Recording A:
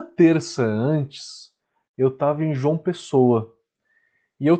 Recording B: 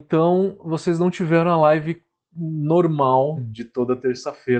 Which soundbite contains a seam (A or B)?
B